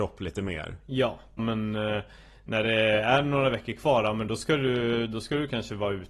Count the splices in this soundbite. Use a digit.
1